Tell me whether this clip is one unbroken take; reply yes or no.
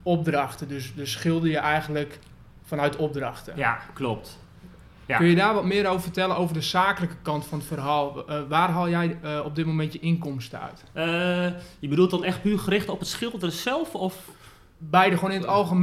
yes